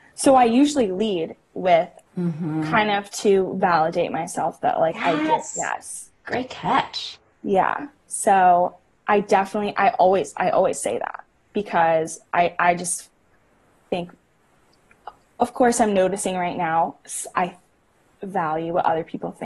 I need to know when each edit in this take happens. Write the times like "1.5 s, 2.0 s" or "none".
2.1 s